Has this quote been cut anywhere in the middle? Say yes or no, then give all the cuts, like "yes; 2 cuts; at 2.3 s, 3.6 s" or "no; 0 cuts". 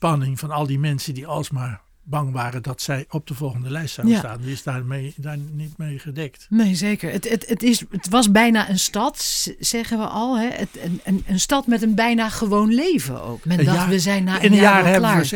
yes; 1 cut; at 13.4 s